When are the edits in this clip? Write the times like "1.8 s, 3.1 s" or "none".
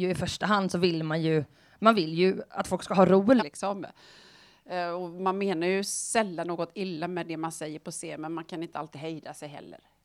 3.4 s